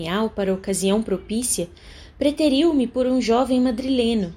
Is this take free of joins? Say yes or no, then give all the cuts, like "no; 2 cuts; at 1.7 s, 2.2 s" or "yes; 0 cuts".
yes; 0 cuts